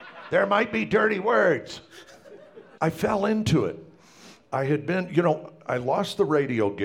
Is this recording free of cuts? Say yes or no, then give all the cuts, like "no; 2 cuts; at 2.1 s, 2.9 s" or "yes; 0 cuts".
no; 1 cut; at 2.8 s